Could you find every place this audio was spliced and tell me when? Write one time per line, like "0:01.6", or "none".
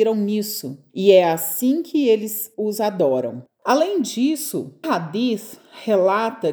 0:03.5
0:04.8